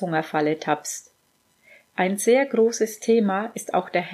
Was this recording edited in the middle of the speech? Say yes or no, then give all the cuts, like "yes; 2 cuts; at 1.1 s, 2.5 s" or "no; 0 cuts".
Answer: no; 0 cuts